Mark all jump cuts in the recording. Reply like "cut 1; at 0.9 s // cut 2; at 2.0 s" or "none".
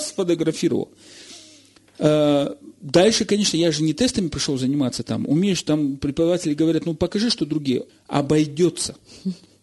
cut 1; at 7.9 s